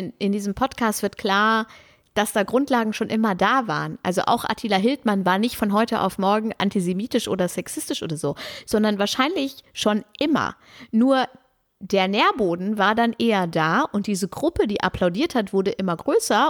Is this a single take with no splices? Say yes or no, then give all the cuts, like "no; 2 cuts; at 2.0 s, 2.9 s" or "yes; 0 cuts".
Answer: yes; 0 cuts